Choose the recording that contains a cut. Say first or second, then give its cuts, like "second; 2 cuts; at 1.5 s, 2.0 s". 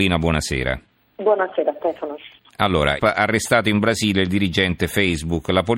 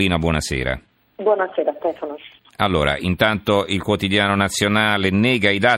first; 1 cut; at 3.0 s